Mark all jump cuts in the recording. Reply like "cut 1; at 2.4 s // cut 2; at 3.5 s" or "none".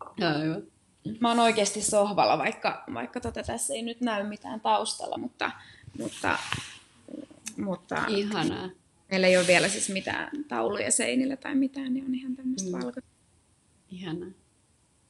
none